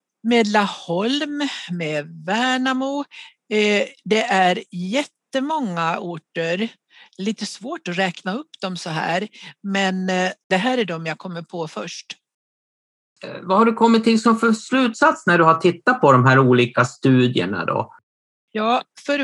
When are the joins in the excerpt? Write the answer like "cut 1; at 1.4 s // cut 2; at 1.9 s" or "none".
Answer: none